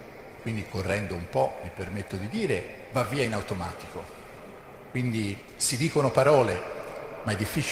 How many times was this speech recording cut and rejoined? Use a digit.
0